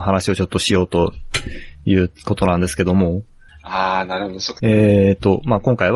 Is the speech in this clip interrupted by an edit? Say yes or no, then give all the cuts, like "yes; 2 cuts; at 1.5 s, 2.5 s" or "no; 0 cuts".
yes; 2 cuts; at 3.5 s, 4.6 s